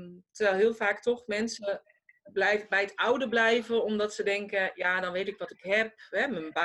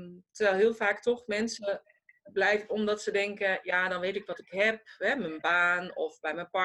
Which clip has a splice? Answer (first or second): second